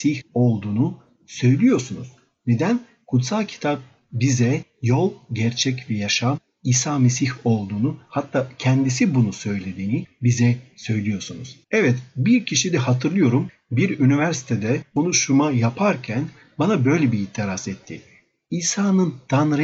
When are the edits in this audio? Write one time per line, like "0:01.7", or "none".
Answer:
0:11.6